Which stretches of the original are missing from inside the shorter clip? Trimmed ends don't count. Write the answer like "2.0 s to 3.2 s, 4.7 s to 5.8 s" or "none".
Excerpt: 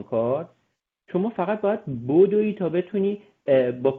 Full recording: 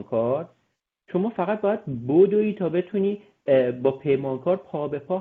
none